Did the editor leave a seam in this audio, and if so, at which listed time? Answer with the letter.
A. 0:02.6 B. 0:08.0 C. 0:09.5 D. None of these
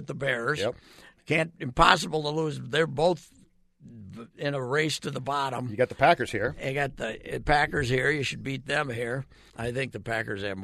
C